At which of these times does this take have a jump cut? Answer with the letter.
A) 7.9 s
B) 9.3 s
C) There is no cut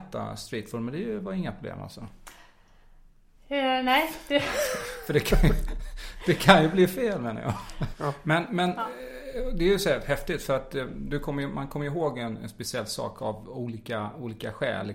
A